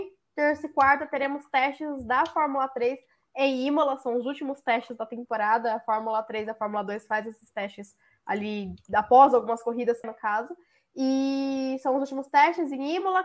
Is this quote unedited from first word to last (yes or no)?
no